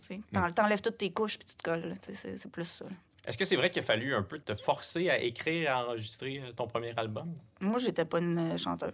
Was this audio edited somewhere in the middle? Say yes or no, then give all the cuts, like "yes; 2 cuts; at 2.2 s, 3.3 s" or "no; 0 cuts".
no; 0 cuts